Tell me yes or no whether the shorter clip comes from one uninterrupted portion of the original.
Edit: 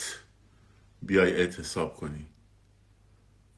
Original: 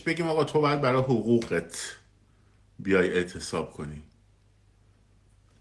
yes